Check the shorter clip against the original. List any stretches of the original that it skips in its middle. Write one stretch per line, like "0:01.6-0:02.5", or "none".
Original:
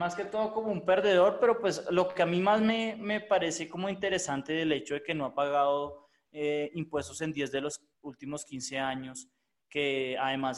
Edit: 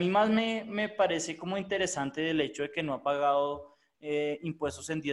none

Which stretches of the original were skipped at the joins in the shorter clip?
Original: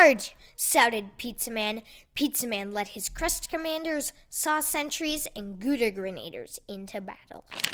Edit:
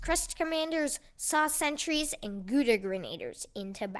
none

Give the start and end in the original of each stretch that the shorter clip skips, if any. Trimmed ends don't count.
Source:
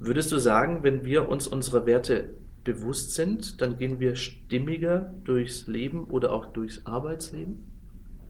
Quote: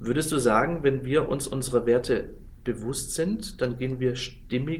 none

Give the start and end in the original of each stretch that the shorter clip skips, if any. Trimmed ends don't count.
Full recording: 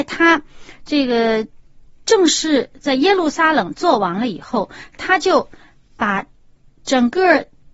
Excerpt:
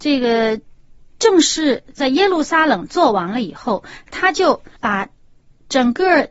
0:05.6-0:05.9

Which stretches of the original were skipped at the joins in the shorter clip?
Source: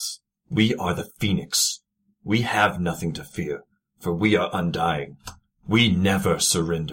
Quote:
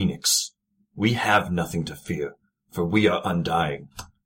none

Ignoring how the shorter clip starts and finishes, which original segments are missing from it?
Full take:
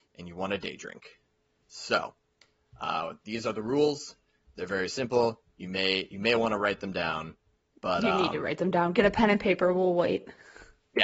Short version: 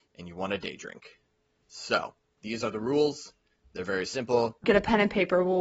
0:02.4-0:03.2
0:05.5-0:08.9

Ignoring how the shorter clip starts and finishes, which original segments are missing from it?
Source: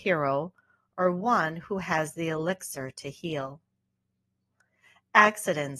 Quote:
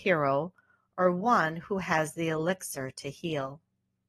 none

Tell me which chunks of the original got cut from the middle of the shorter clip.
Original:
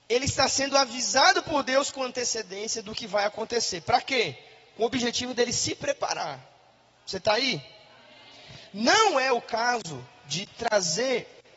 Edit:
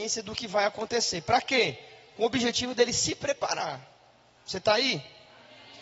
none

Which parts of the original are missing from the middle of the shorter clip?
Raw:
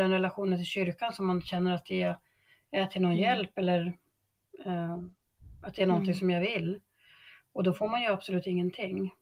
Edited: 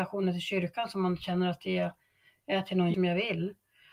0:03.2-0:06.2

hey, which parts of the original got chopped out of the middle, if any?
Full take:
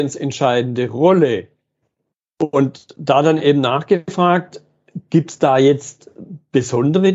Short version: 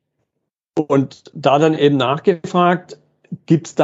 none

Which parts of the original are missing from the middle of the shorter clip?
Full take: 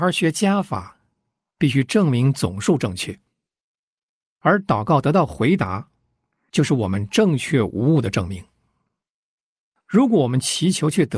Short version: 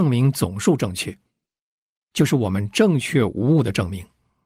0:04.1-0:06.5

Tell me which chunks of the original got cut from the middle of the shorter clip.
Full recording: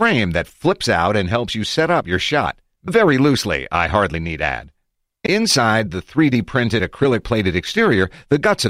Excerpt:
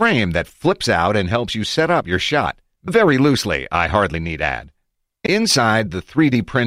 none

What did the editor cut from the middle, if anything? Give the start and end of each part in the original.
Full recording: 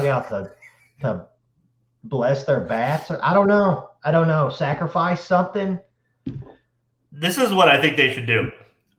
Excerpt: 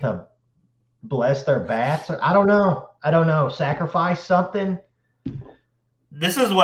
none

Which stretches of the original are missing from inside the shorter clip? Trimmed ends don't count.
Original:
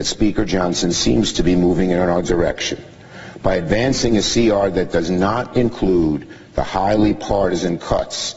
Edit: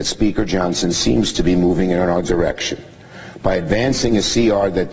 none

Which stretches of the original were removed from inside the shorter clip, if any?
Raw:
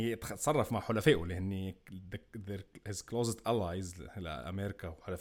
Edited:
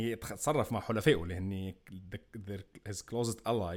none

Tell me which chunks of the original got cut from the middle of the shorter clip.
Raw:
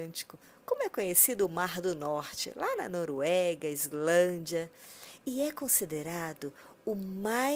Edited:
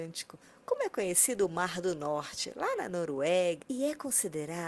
0:03.6-0:05.2

